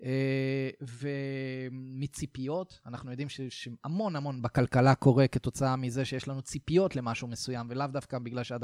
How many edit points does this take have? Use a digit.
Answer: 0